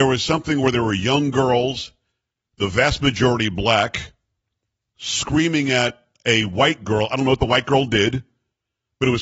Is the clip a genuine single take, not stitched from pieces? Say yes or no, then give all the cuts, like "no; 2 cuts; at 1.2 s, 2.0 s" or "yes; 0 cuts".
yes; 0 cuts